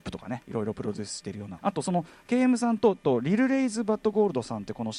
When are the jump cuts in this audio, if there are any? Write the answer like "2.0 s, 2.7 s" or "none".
1.6 s